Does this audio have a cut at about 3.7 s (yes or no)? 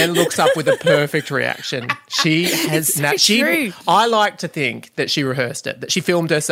no